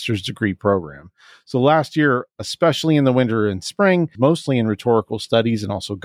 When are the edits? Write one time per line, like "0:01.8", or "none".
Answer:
0:04.1